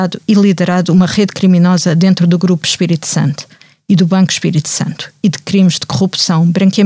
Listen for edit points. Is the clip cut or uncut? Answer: uncut